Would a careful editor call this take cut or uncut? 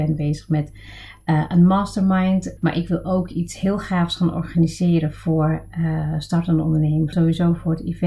cut